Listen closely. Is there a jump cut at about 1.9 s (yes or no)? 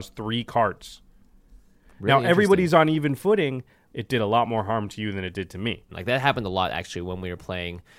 no